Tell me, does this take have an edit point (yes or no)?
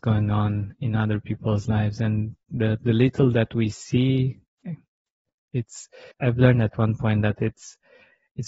yes